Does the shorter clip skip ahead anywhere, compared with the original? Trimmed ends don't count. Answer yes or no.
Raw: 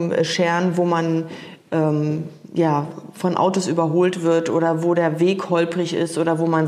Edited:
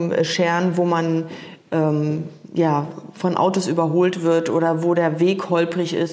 no